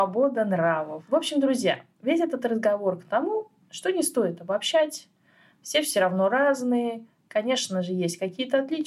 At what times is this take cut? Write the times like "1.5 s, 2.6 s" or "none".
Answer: none